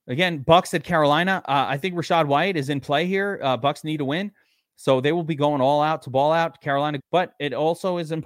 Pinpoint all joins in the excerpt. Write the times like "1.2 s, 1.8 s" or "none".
7.0 s